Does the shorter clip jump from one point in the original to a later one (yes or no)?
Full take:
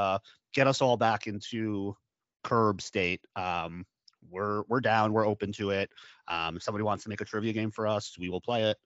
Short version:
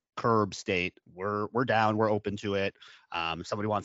yes